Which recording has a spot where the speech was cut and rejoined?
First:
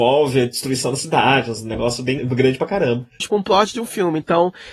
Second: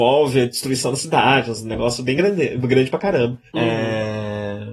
first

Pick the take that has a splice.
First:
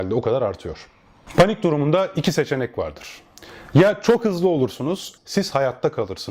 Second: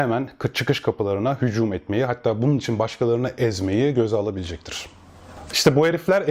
first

